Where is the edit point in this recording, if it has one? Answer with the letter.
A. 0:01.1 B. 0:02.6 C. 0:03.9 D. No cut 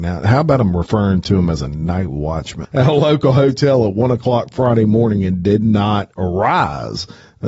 B